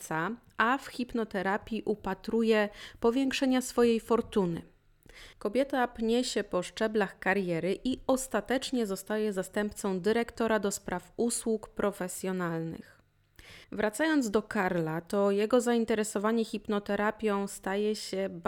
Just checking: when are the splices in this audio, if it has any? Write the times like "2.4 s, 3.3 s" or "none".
5.3 s, 13.6 s